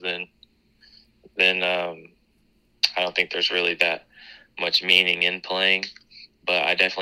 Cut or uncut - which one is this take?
uncut